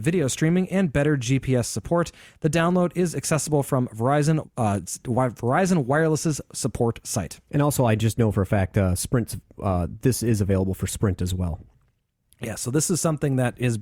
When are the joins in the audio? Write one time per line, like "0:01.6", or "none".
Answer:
0:04.4